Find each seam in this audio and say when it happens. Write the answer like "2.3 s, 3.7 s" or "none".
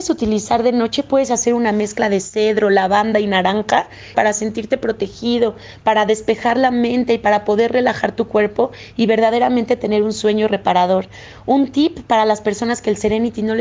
4.1 s